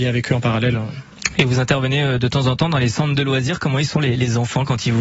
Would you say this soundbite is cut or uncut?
uncut